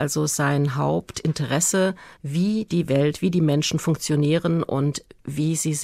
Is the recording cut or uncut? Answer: cut